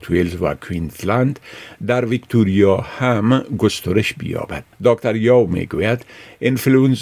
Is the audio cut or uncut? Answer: cut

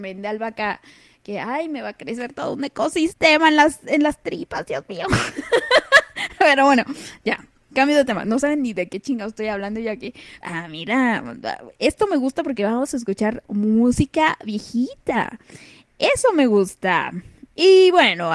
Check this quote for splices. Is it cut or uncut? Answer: cut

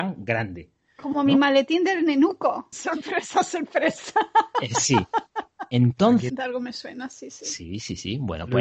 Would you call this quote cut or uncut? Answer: cut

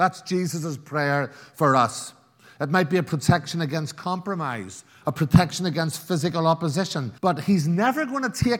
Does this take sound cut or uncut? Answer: cut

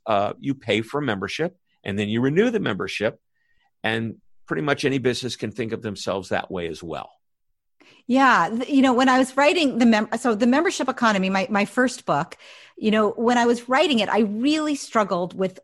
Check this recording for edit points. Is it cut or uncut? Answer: uncut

